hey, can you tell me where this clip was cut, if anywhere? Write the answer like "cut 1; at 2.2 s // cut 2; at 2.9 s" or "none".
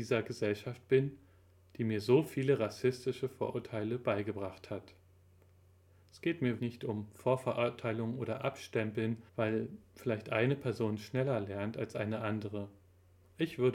cut 1; at 6.6 s // cut 2; at 9.3 s